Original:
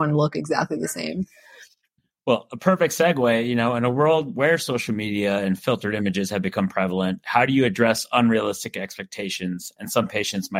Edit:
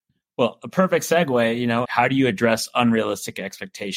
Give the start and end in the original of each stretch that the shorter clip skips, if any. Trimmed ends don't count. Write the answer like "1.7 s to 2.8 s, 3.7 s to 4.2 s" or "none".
3.7 s to 7.2 s